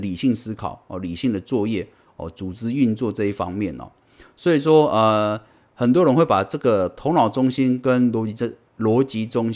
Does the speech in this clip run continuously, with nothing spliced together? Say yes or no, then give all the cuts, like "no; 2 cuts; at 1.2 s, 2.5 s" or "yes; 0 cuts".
yes; 0 cuts